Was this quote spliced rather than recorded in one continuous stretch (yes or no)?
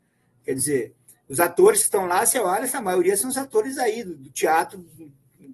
no